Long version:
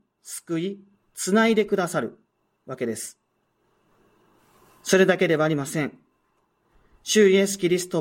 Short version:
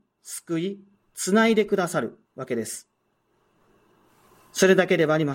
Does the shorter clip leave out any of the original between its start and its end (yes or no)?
yes